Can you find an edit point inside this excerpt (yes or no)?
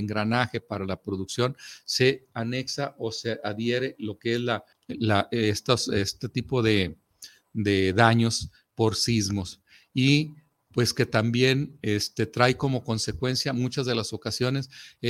yes